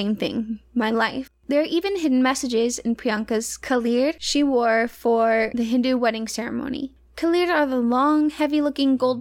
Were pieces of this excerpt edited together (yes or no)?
yes